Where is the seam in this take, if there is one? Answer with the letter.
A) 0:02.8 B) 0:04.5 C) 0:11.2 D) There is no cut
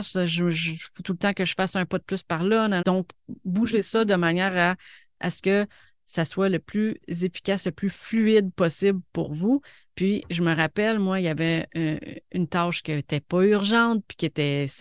A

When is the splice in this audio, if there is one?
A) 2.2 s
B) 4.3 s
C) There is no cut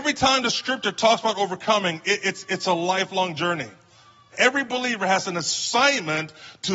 B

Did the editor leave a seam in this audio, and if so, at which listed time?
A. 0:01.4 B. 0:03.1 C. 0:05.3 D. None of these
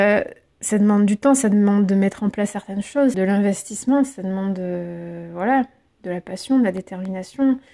B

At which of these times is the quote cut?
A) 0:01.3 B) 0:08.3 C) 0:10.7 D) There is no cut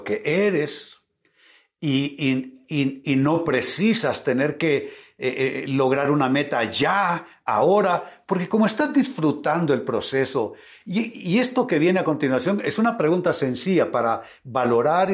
D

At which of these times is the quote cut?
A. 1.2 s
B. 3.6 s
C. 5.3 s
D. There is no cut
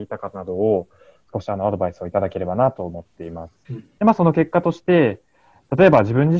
B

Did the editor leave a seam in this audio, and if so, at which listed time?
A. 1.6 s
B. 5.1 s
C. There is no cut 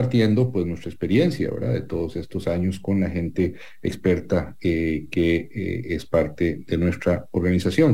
C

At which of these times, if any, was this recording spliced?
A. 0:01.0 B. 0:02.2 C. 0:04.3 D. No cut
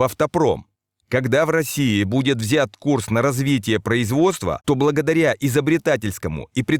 A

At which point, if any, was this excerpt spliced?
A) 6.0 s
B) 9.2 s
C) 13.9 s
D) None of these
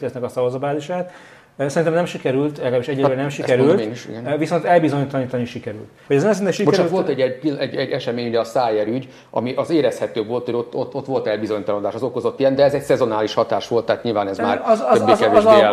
A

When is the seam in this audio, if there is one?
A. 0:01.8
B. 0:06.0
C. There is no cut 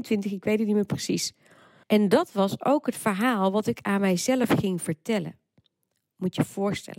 A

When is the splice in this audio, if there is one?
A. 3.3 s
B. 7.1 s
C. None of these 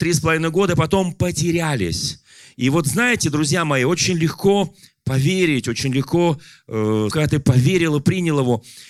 B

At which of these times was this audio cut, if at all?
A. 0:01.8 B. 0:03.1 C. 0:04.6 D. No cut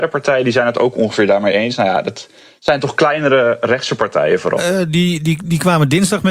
C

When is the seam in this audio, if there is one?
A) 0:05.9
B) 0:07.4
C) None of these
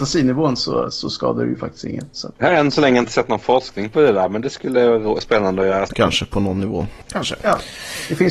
A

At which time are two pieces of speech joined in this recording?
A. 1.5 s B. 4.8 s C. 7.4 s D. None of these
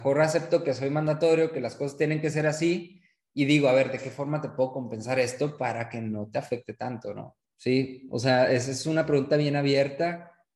C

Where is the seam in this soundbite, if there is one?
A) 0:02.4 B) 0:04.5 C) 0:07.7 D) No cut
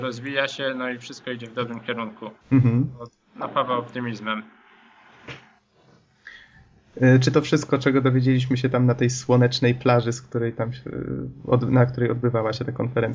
A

